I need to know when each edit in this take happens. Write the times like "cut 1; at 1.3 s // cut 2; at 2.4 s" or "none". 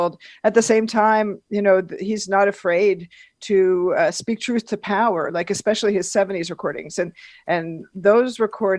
none